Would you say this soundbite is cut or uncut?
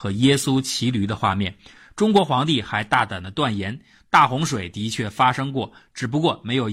uncut